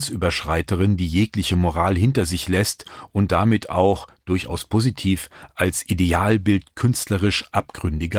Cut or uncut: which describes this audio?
uncut